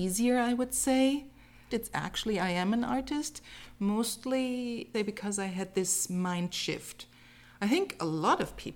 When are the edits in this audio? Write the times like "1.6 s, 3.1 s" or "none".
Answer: 1.7 s, 4.9 s